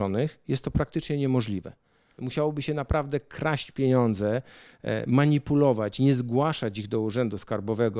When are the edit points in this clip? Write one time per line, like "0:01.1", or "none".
0:02.2